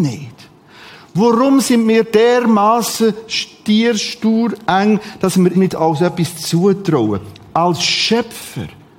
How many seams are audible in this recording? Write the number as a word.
one